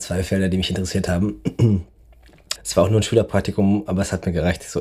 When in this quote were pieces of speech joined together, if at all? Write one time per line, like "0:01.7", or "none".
0:02.6

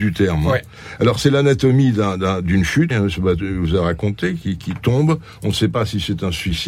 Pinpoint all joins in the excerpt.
0:02.9

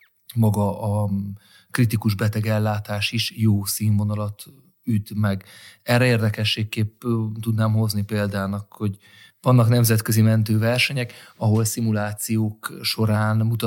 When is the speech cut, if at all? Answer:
none

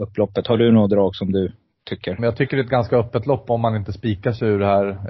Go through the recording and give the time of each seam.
0:02.2

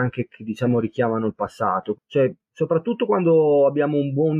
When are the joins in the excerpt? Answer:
0:01.9

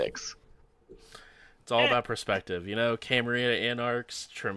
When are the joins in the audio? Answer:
none

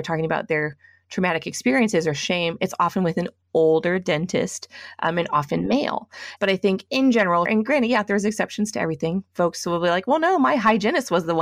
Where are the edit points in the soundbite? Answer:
0:06.4
0:07.5

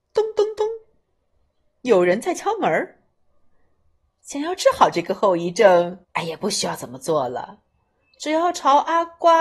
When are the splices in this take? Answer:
0:04.0
0:06.0

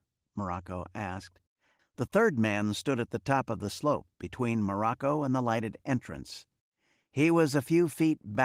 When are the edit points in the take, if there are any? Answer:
0:01.8

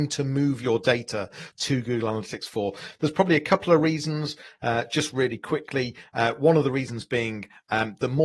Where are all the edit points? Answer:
none

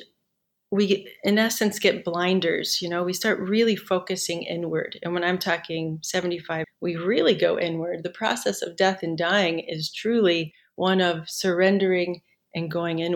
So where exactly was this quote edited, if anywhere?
0:06.6

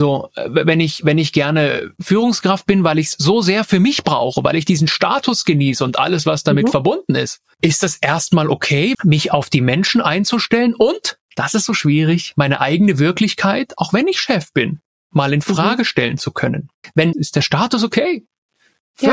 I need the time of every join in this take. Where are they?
0:08.9
0:17.1

